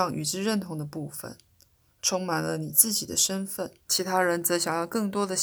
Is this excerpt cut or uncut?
cut